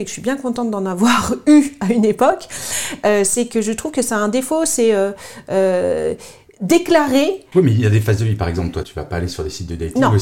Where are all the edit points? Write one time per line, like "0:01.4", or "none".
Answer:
0:07.5
0:08.8